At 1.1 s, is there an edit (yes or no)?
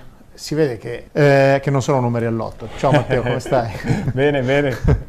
yes